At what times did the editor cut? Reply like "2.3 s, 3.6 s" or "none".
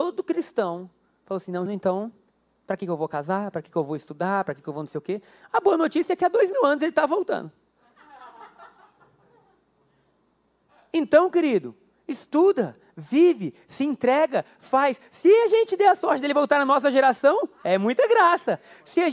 1.7 s